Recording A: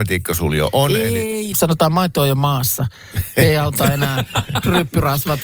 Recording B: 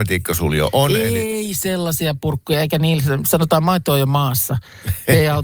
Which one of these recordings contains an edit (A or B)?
A